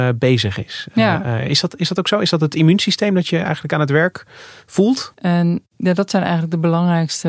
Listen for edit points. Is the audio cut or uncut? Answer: cut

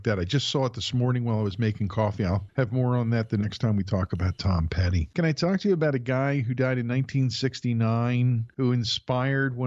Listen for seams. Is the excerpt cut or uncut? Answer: uncut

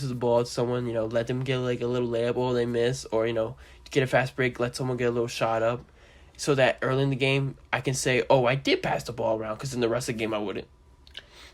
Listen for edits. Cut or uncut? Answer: uncut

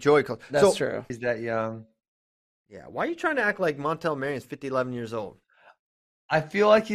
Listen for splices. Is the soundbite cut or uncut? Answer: cut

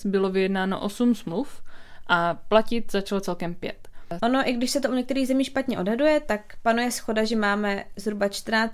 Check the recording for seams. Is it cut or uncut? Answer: cut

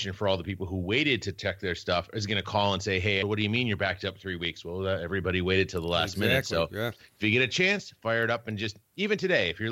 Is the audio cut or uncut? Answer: cut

